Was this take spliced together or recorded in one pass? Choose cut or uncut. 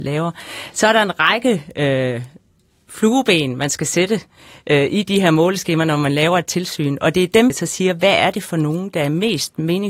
cut